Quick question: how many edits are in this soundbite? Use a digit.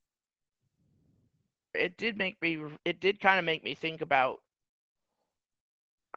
2